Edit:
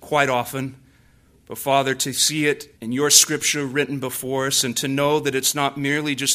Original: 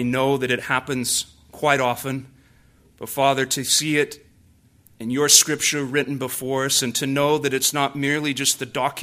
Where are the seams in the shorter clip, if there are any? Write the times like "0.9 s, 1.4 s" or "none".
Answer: 2.8 s